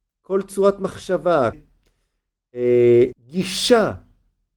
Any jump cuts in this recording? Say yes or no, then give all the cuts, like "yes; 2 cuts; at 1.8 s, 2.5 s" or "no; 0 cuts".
yes; 2 cuts; at 1.5 s, 3.1 s